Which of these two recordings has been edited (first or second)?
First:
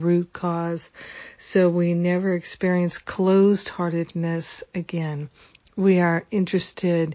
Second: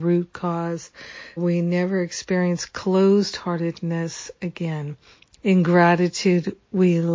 second